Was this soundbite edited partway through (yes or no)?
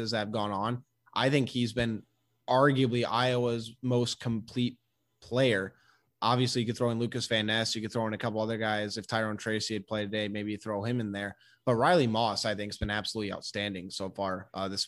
no